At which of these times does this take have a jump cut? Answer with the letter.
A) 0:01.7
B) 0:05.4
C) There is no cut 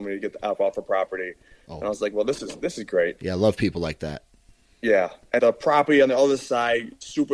B